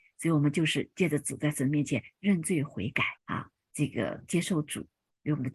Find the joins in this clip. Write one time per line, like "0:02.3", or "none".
0:03.2